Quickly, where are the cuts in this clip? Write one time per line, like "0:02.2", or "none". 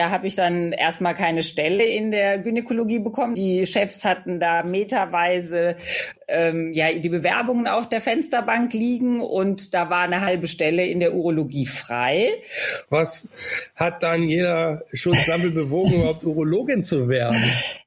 0:03.3
0:12.9